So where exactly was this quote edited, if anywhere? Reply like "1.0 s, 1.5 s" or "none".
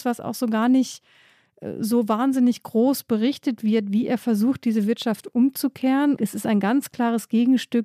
6.2 s